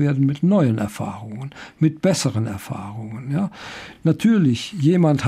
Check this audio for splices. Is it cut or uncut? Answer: uncut